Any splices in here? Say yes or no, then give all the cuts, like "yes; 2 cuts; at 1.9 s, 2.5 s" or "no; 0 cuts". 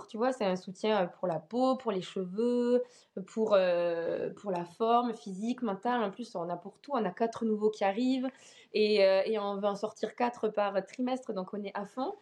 no; 0 cuts